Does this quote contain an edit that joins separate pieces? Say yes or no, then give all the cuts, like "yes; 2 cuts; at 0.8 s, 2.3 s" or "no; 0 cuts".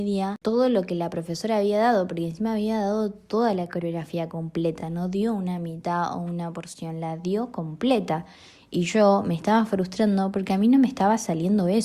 no; 0 cuts